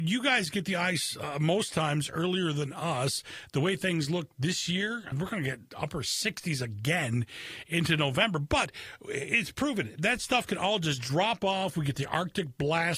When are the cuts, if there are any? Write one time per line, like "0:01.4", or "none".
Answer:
0:05.1

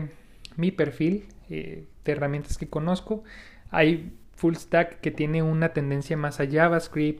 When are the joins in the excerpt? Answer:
none

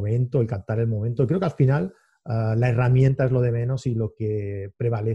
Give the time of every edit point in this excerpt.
none

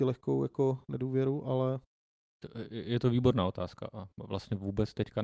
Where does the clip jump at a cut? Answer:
none

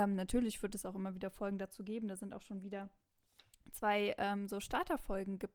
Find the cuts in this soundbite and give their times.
none

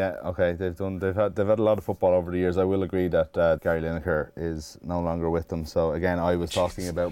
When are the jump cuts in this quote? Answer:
0:03.6

